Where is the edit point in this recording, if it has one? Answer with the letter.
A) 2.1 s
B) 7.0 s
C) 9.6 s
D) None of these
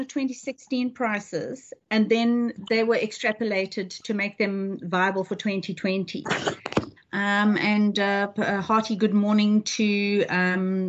B